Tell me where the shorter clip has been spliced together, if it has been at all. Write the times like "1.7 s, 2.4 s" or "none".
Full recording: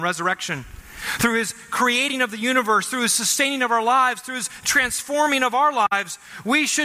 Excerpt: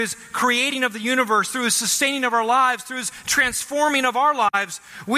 none